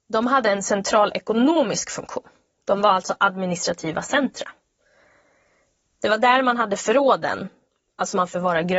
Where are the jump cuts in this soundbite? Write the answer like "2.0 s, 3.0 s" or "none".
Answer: none